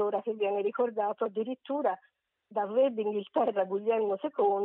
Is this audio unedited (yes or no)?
yes